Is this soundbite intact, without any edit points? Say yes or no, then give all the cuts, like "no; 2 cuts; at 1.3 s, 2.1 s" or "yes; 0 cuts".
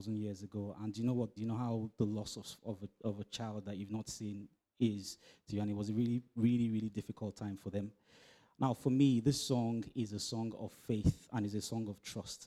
no; 1 cut; at 1.4 s